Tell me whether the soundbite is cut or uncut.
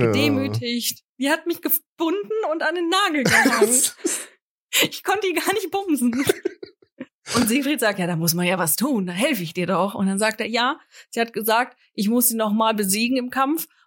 cut